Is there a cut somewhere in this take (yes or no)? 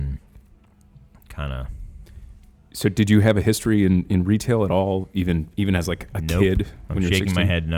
no